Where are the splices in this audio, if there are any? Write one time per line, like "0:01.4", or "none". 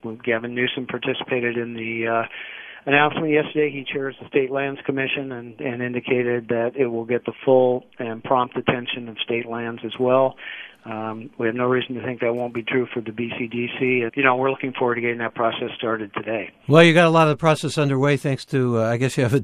0:14.1